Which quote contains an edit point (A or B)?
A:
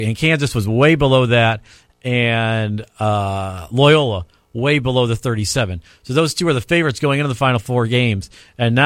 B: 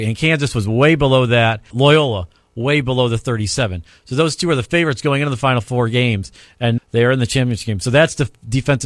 B